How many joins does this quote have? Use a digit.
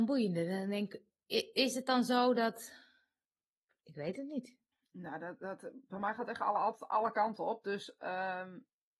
1